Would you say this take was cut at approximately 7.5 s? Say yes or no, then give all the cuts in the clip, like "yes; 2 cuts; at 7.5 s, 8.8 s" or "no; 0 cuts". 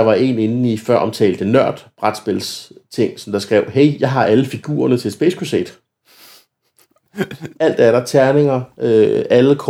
yes; 1 cut; at 7.5 s